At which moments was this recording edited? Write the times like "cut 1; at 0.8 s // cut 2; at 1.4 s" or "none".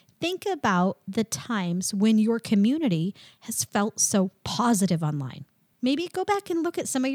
none